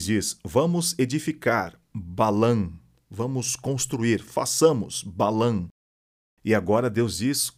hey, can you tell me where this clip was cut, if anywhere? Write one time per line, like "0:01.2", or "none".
none